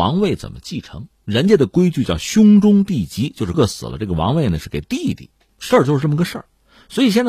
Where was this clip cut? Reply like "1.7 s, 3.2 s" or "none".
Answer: 3.5 s, 5.5 s